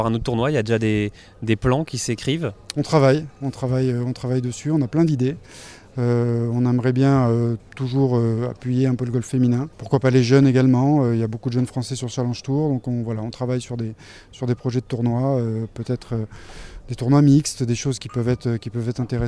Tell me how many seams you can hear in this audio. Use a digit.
1